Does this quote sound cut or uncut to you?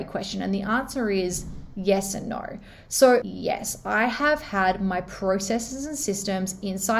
cut